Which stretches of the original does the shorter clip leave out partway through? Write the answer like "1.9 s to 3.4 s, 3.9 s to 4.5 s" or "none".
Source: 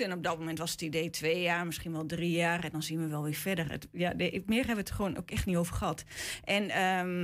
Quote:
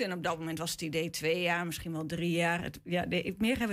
2.6 s to 3.7 s